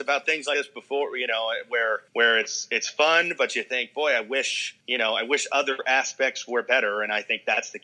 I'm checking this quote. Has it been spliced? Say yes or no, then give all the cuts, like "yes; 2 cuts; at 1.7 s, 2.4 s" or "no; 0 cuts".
yes; 2 cuts; at 2.1 s, 4.8 s